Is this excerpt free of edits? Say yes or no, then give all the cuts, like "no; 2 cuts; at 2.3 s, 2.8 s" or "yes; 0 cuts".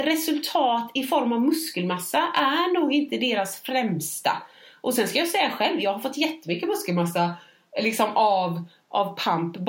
yes; 0 cuts